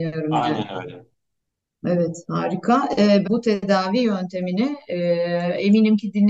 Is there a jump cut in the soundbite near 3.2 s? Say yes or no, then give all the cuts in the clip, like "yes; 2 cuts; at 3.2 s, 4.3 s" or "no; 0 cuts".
yes; 1 cut; at 3.2 s